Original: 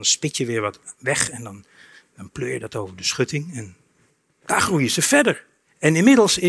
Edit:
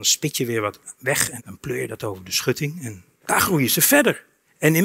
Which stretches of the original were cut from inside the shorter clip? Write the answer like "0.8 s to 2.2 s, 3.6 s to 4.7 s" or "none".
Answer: 1.4 s to 2.1 s, 3.9 s to 4.3 s